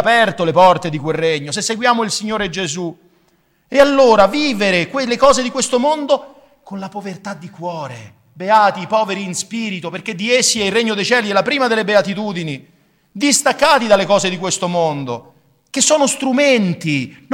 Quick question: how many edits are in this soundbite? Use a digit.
0